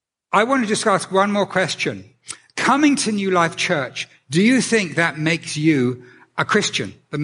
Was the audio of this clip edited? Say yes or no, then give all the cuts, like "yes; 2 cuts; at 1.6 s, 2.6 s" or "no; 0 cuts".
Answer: no; 0 cuts